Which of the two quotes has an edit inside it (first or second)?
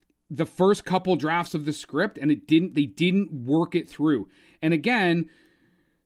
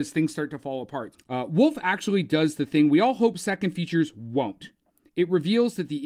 second